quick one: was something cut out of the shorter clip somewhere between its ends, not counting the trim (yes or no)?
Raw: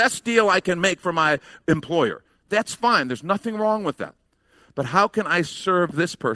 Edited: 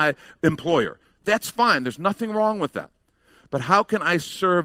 no